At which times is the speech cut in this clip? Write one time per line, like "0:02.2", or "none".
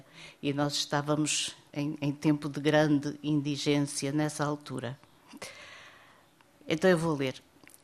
0:01.7